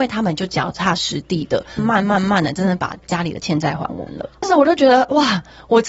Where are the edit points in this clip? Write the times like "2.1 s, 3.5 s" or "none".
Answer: 1.8 s, 4.4 s